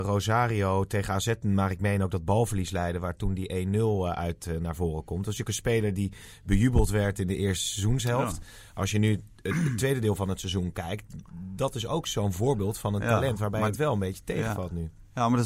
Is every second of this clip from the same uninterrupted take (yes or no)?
yes